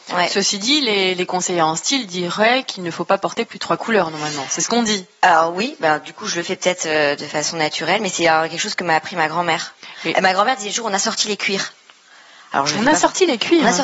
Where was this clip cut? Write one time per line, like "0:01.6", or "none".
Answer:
none